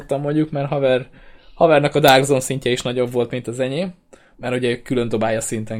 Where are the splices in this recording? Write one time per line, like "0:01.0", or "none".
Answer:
0:04.3